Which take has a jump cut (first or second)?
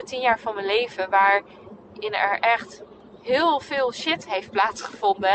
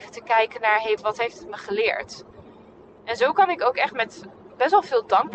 second